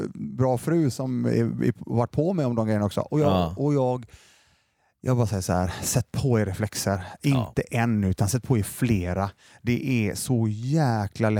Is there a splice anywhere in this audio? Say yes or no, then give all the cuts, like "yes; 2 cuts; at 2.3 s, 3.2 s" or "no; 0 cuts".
no; 0 cuts